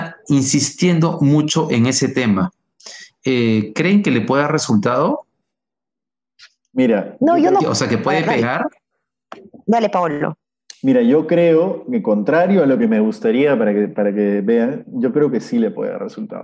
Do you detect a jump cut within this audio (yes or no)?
no